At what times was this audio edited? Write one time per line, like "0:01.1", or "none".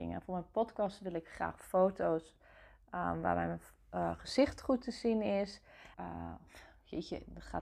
0:05.9